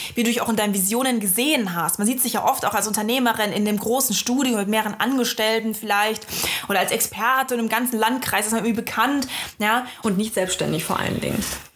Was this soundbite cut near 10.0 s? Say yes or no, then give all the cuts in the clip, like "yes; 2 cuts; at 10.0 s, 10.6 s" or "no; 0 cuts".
yes; 1 cut; at 10.0 s